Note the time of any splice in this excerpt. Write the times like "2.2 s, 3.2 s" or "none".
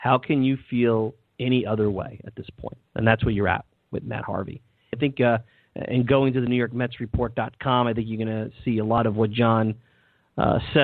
2.9 s, 4.9 s